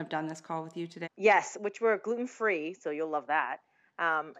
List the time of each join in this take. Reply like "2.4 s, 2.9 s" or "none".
1.0 s